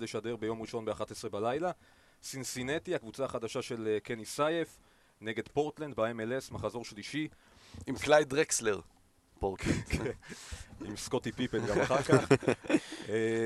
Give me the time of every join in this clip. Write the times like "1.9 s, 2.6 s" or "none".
none